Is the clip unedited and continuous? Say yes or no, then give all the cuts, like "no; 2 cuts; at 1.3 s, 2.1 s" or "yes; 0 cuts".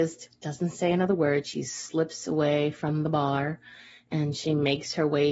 yes; 0 cuts